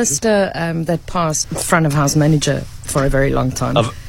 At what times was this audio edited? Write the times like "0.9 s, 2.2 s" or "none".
1.4 s